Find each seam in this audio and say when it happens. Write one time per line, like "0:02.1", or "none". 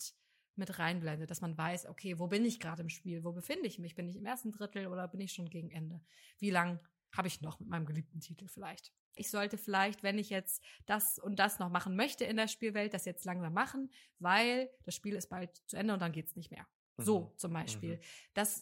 0:09.2